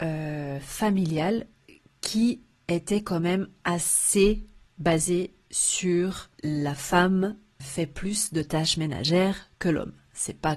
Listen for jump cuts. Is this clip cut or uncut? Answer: cut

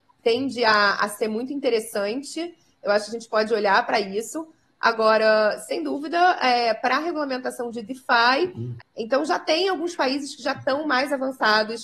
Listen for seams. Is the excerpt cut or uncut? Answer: cut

